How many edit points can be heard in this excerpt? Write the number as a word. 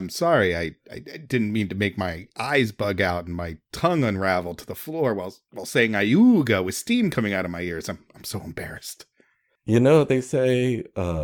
zero